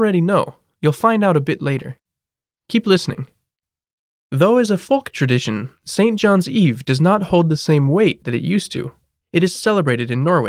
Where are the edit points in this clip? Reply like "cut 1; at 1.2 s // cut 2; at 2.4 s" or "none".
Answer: cut 1; at 9.5 s